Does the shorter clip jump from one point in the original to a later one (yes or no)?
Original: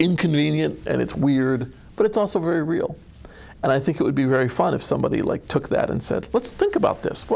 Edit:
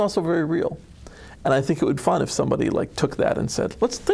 yes